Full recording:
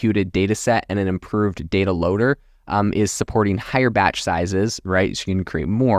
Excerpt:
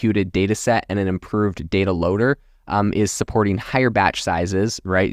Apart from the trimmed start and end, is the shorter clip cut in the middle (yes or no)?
no